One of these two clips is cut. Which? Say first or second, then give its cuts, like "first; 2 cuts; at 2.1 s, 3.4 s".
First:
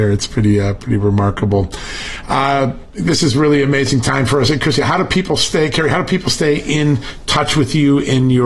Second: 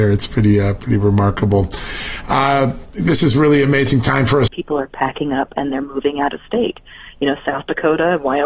second; 1 cut; at 4.5 s